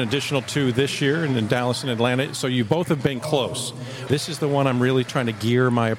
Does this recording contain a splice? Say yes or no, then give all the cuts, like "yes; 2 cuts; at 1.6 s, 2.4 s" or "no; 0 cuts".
yes; 1 cut; at 4.1 s